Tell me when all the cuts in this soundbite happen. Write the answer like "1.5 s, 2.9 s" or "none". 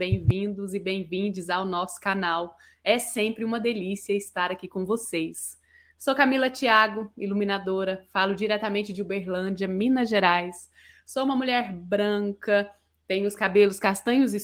none